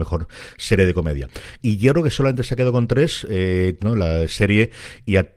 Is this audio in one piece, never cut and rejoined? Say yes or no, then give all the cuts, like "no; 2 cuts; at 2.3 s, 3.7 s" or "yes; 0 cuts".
no; 2 cuts; at 1.6 s, 3.8 s